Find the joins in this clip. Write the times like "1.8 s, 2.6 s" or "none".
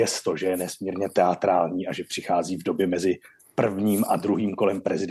none